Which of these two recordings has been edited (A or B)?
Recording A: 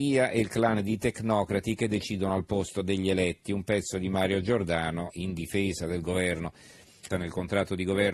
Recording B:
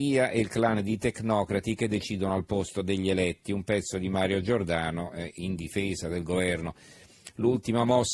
A